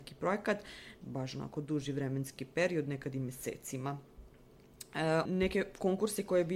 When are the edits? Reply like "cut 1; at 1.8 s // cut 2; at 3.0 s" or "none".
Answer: cut 1; at 1.0 s // cut 2; at 5.3 s